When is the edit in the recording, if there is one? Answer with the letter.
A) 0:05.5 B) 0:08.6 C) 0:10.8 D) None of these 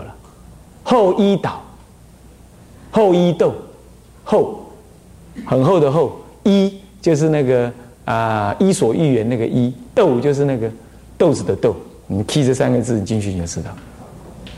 D